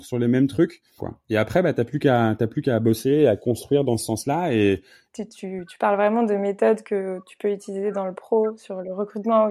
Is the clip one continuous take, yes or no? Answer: no